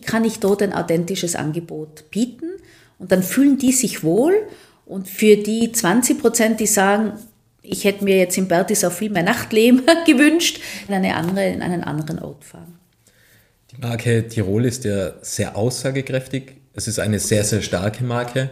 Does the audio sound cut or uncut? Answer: cut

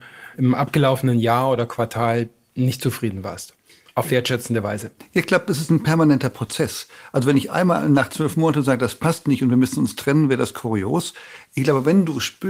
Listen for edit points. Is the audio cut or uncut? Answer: uncut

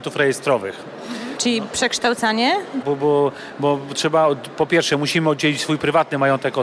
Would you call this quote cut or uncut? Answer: cut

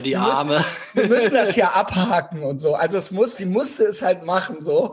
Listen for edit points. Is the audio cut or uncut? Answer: cut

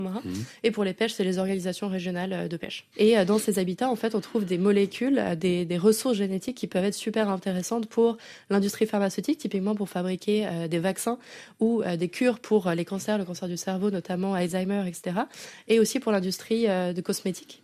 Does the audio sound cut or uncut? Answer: cut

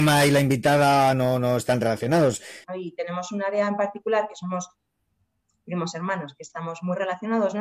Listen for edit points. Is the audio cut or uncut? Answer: cut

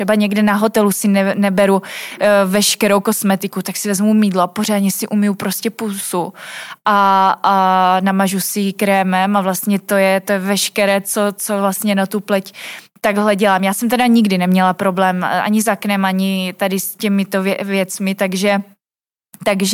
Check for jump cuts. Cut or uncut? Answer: uncut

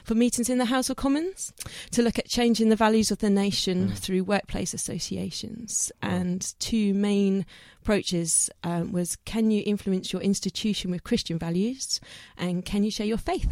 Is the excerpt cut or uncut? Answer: uncut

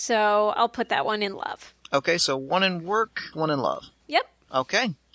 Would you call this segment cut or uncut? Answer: cut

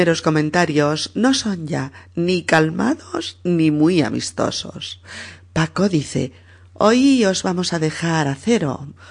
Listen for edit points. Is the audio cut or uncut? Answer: uncut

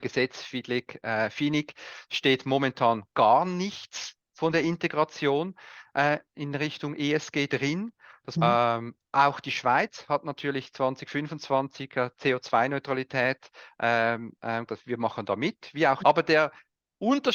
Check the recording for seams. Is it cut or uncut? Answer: cut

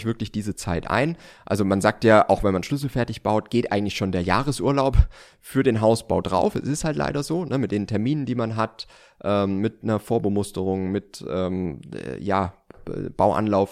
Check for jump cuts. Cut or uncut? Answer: uncut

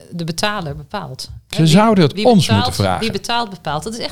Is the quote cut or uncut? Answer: uncut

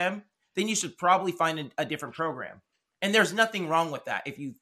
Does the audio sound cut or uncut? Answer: uncut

